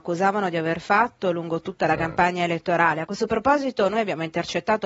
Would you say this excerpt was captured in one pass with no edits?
yes; 0 cuts

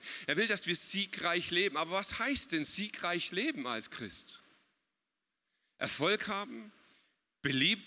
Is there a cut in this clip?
no; 0 cuts

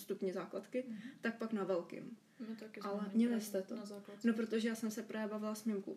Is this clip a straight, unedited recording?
no; 1 cut; at 3.1 s

